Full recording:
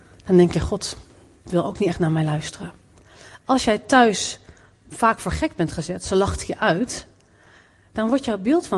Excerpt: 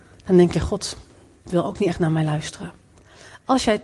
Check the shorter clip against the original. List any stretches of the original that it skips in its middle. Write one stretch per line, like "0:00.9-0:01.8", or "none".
none